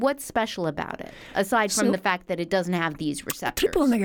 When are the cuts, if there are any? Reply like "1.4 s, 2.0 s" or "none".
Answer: none